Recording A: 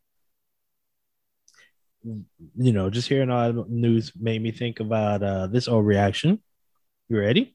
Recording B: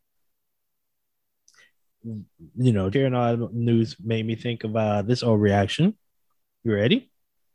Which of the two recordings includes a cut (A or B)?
B